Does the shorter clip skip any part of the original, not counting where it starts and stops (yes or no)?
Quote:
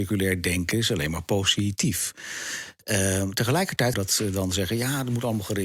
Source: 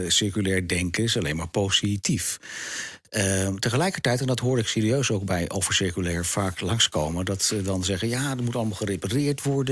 yes